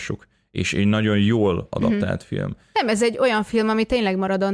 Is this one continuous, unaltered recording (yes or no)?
yes